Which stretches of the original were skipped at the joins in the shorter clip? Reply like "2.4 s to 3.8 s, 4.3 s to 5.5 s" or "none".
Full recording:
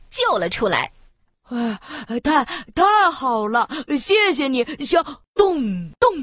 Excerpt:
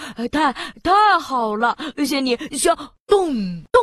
4.0 s to 4.3 s